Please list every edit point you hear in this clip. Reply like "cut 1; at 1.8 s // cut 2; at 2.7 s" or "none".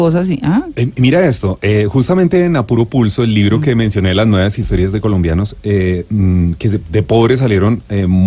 none